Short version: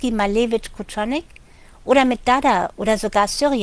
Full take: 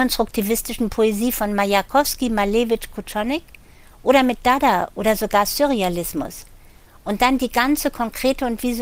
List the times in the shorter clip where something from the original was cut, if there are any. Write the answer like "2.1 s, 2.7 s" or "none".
none

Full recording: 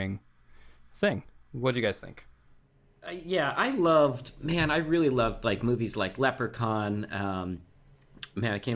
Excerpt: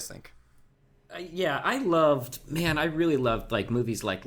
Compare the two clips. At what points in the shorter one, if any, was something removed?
none

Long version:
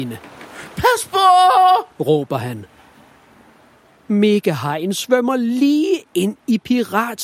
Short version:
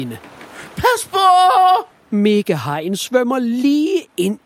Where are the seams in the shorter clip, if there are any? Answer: 1.9 s

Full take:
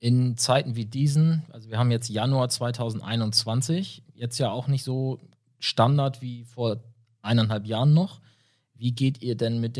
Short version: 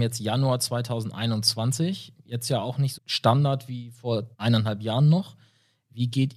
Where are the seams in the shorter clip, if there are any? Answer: 2.9 s, 4.3 s

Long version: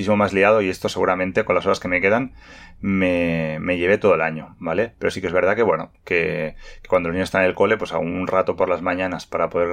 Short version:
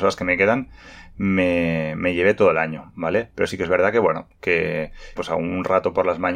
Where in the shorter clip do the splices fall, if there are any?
5.2 s

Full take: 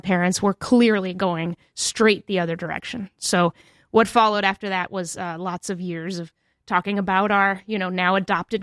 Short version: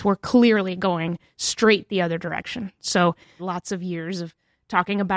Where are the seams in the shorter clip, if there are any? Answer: 3.4 s

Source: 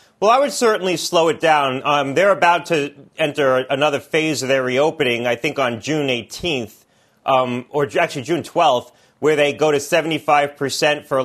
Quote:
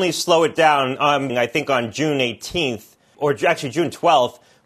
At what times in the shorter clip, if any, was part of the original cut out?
1.3 s, 3.1 s

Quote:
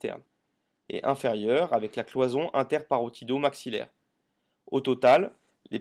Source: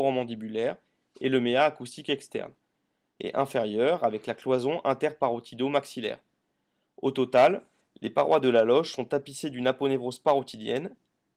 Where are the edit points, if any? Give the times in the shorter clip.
none

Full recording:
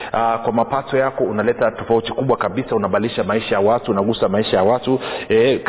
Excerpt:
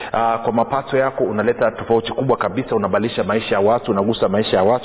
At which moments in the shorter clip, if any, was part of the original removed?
none

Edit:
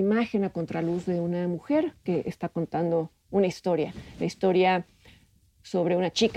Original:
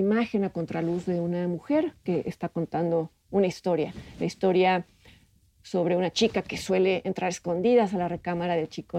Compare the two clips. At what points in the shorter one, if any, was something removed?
none

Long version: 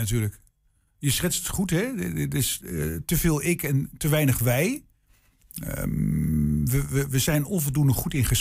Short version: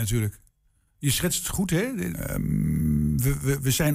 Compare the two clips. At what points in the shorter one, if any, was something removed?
2.1 s

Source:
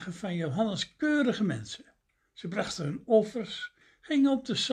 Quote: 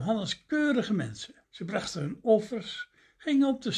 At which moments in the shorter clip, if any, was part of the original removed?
1.4 s

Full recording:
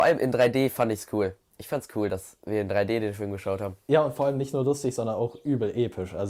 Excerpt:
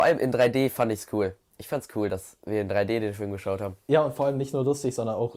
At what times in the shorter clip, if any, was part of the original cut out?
none

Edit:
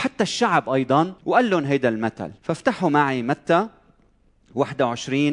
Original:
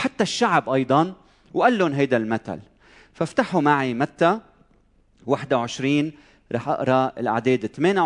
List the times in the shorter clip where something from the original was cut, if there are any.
1.2 s, 2.4 s

